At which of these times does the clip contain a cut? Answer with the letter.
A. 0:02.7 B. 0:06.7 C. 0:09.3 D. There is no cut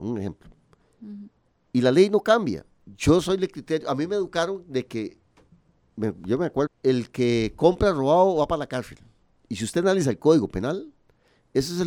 B